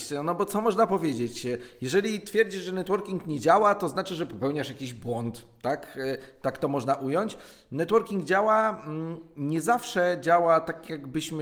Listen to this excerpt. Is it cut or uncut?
uncut